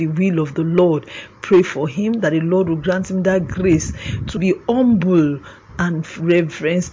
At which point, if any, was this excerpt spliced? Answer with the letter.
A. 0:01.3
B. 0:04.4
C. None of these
B